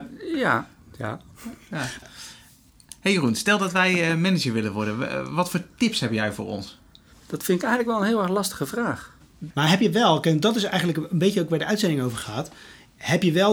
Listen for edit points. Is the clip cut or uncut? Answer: cut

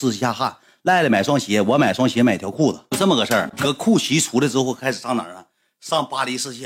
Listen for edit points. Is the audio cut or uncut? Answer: uncut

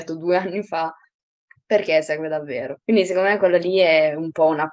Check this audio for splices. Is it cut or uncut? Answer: cut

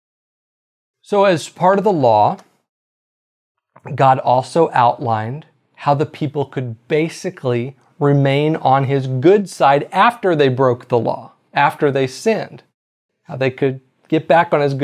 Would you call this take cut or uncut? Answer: uncut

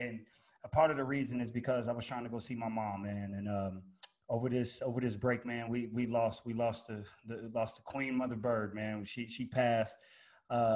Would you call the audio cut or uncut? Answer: uncut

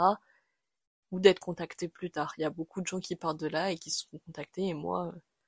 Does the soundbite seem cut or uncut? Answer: cut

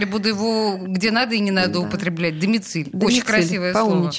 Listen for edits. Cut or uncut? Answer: uncut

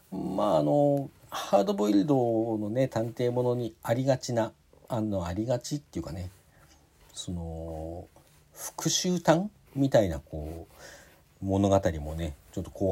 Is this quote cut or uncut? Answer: uncut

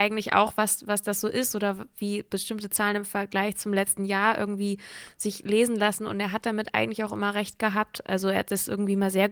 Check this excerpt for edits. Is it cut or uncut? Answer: uncut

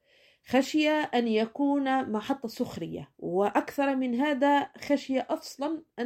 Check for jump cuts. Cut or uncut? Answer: cut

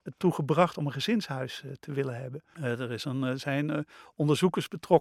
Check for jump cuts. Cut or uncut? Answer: cut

